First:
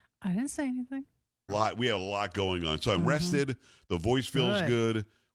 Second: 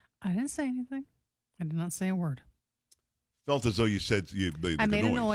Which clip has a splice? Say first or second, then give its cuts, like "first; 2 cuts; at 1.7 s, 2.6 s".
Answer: first; 1 cut; at 1.5 s